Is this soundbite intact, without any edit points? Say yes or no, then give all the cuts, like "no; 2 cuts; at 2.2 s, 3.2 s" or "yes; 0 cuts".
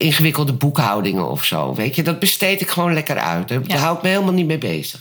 yes; 0 cuts